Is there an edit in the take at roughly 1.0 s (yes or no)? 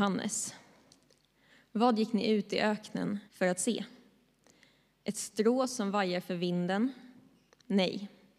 no